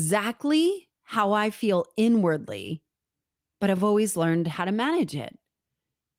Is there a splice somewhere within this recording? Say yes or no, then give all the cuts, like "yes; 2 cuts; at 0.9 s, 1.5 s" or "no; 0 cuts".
no; 0 cuts